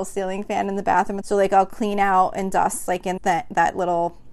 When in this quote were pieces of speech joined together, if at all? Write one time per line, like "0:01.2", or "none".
0:01.2
0:03.2